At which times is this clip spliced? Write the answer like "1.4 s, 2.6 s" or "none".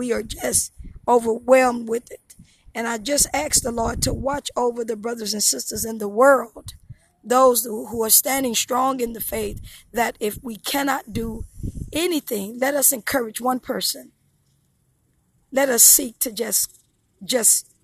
none

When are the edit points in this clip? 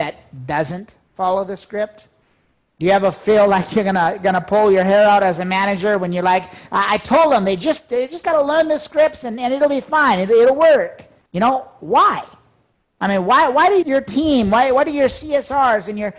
11.3 s, 13.8 s

